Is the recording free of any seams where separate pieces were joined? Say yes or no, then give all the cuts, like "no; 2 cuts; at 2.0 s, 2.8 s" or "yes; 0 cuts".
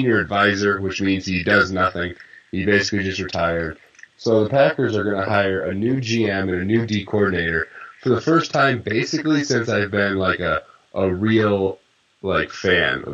yes; 0 cuts